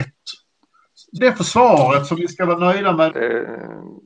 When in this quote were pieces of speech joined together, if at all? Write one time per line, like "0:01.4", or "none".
0:01.2
0:03.1